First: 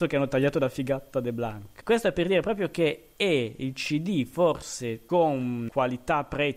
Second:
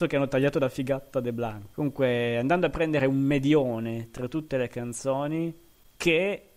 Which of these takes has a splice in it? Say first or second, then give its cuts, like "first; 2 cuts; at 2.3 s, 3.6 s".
second; 1 cut; at 1.7 s